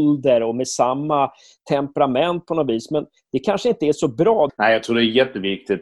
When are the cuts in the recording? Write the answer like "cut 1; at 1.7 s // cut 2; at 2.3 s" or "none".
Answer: cut 1; at 4.5 s